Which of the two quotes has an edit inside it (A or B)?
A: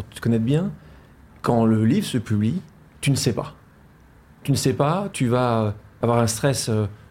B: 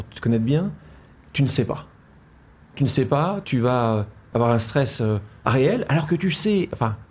B